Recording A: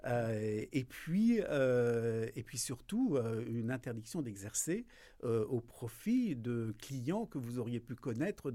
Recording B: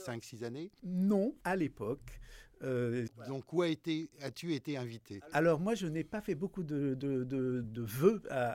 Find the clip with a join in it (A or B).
B